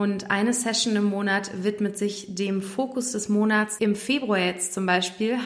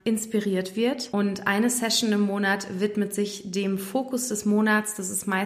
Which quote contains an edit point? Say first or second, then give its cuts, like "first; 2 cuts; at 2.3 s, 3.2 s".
first; 1 cut; at 3.8 s